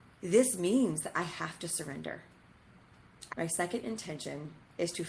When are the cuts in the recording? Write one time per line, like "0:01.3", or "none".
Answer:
0:03.3